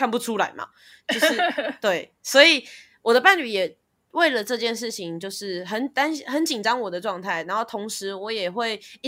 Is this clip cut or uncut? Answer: uncut